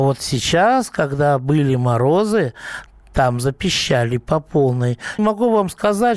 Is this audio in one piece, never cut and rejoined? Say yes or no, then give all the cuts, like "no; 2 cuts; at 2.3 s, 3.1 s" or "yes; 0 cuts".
no; 1 cut; at 5.2 s